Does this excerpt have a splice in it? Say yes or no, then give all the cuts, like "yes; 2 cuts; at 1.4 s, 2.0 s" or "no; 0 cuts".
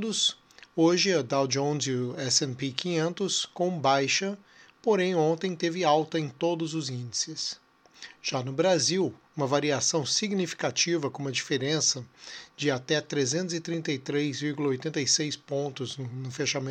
no; 0 cuts